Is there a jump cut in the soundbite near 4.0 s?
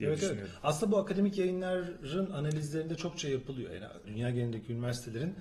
yes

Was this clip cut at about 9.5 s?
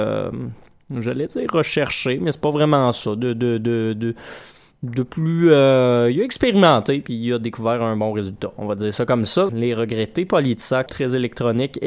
yes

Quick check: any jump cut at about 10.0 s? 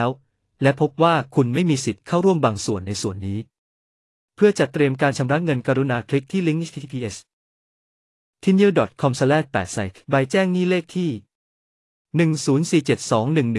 yes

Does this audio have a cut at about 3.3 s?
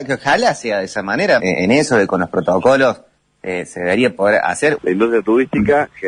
no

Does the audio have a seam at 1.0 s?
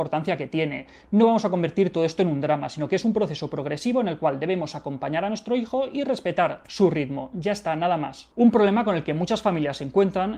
yes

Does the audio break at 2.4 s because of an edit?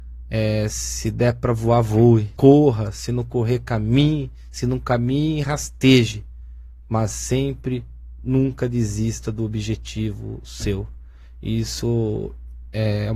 yes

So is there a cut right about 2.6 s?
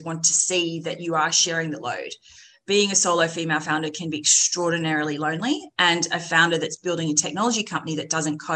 no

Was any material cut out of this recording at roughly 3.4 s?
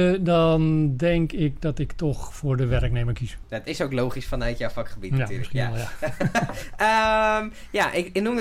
yes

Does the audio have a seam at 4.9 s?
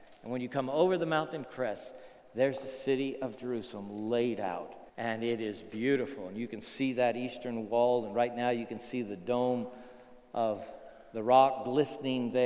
yes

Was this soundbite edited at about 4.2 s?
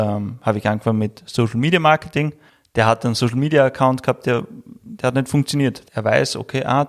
no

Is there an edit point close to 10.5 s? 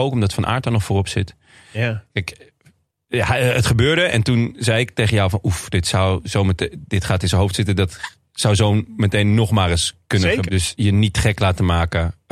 yes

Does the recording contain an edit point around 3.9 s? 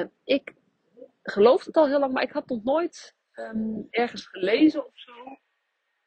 yes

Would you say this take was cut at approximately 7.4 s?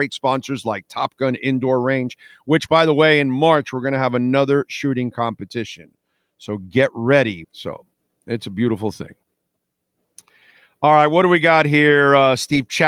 yes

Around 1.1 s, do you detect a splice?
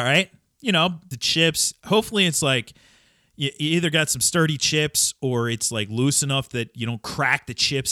yes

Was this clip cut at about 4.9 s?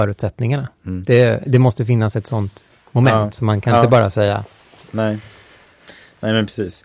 no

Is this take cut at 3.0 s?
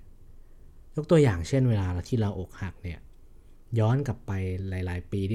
no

